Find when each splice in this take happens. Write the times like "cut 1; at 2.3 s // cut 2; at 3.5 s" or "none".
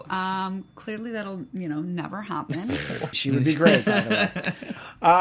cut 1; at 3.1 s

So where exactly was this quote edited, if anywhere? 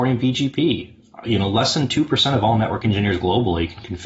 none

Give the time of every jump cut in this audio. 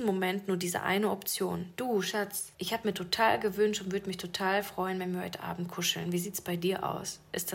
cut 1; at 2.5 s

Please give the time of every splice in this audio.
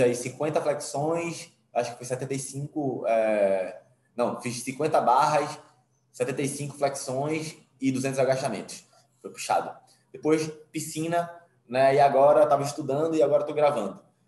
none

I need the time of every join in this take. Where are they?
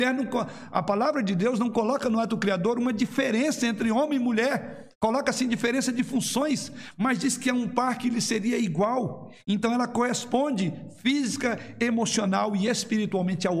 cut 1; at 4.9 s

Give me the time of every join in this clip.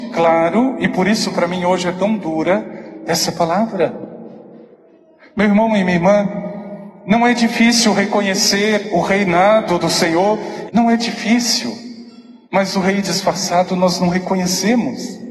cut 1; at 10.7 s // cut 2; at 12.5 s

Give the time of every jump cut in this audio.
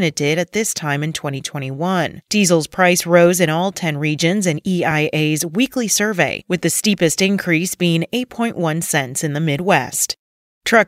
none

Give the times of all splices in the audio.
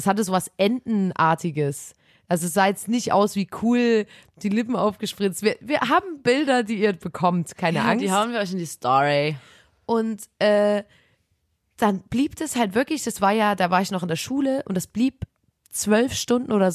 none

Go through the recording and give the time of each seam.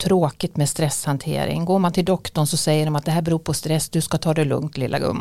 none

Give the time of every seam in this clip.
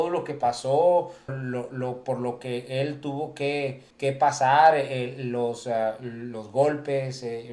cut 1; at 1.3 s // cut 2; at 3.9 s

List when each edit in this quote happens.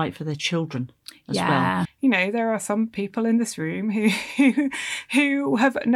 cut 1; at 1.8 s

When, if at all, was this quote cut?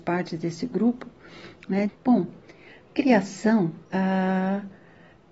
cut 1; at 1.9 s // cut 2; at 3.8 s

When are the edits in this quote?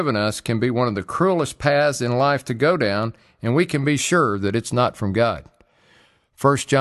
none

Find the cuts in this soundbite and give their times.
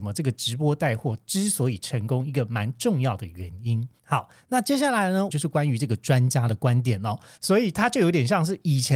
cut 1; at 4.0 s // cut 2; at 5.3 s // cut 3; at 7.4 s

